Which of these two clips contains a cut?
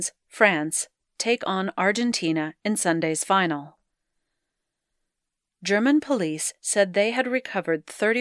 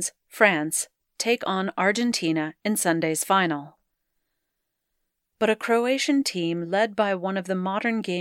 second; 1 cut; at 5.3 s

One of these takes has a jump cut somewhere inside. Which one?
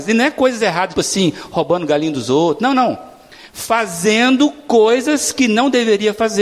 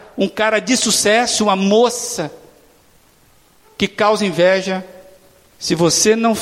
first; 1 cut; at 0.9 s

